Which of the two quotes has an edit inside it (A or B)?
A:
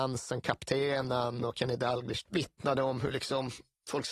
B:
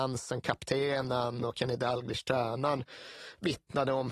A